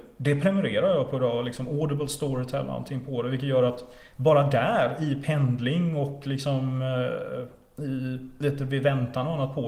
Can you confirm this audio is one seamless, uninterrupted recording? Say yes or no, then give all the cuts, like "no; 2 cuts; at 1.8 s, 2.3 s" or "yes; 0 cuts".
yes; 0 cuts